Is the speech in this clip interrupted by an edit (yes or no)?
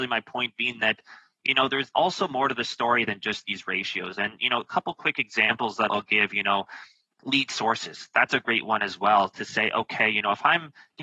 no